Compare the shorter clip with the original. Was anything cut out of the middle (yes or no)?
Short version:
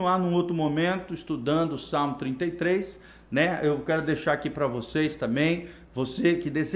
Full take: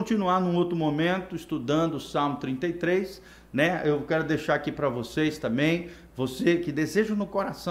no